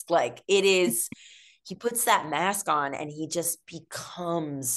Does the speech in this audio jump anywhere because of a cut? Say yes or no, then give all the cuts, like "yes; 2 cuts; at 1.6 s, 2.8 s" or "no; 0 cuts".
no; 0 cuts